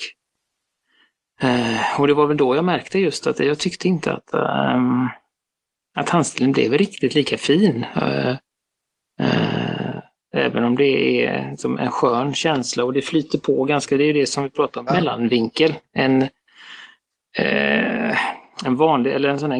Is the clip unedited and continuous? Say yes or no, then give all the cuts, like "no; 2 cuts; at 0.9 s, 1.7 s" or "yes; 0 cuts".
no; 1 cut; at 14.9 s